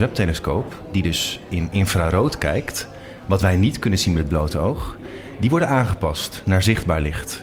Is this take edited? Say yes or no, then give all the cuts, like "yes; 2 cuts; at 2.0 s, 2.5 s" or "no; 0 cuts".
no; 0 cuts